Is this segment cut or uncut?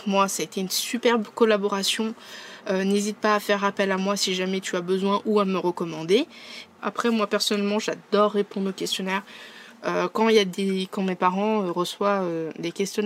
cut